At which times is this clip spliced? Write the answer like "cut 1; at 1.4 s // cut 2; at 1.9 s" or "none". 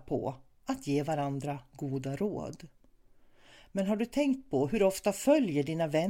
none